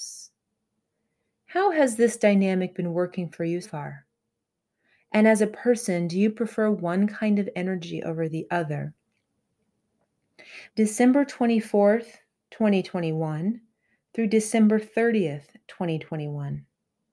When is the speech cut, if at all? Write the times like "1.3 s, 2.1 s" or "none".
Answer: 3.6 s, 10.7 s

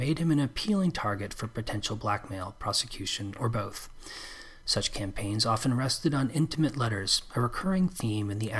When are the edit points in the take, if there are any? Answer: none

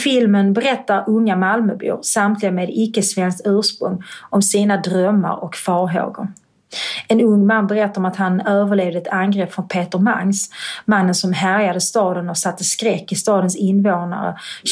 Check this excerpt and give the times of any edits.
none

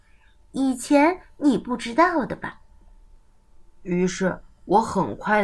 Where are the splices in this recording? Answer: none

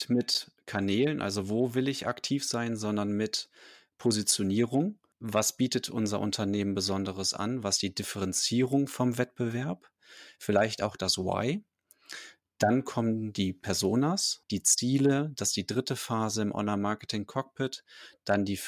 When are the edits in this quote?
5.1 s, 14.4 s

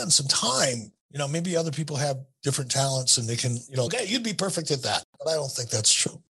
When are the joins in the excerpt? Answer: 1.0 s, 3.9 s

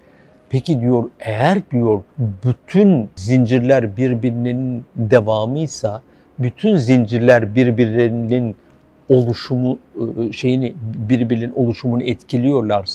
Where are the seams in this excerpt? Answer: 2.1 s

